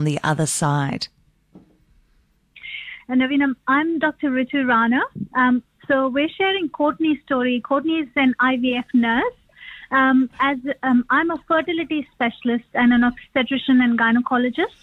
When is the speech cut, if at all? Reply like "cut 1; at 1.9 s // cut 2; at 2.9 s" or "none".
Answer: cut 1; at 3.0 s